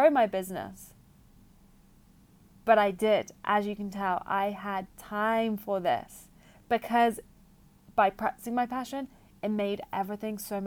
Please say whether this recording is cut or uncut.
uncut